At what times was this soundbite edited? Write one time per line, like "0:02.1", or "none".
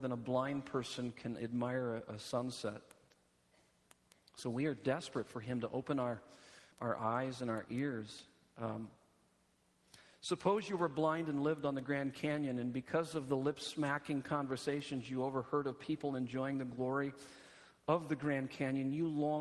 0:06.7